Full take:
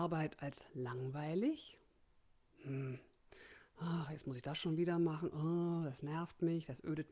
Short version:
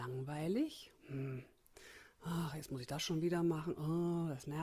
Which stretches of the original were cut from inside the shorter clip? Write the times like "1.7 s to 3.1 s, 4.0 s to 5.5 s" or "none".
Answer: 1.8 s to 2.5 s